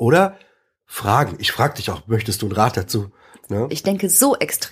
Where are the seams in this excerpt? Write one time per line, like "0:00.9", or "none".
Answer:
0:03.7

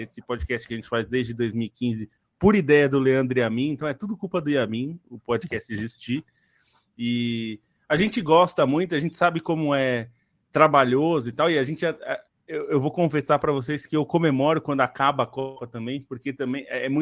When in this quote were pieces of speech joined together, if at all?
none

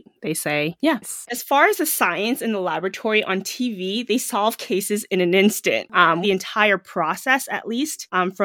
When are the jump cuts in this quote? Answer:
0:01.3
0:06.2

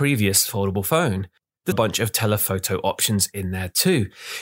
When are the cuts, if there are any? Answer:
0:01.7

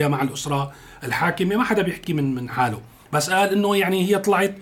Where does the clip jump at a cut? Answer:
none

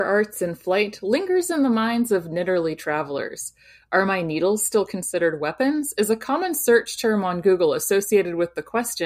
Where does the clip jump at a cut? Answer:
none

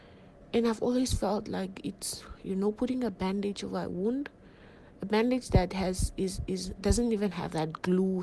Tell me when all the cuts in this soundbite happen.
0:06.8

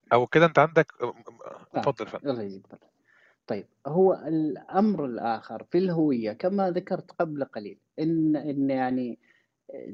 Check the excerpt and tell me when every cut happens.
none

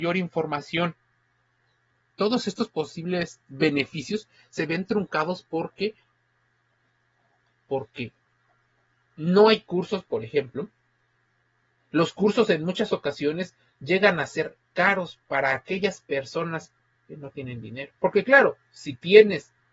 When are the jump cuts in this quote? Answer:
0:18.0

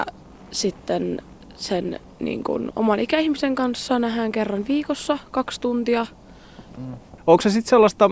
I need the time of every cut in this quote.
0:06.7

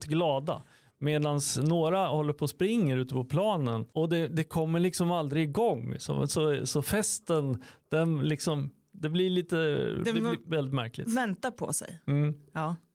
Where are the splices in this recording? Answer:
none

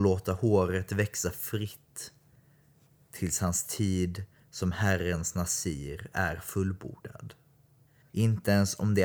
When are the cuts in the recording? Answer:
0:08.1

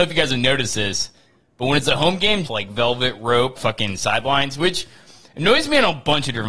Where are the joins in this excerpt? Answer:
0:02.4
0:03.5

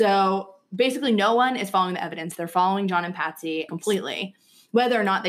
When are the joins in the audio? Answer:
0:03.7

